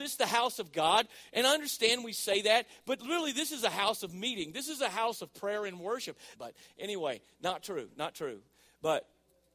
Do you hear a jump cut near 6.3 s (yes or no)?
yes